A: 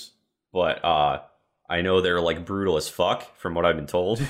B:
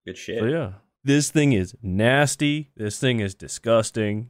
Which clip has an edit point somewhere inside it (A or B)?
B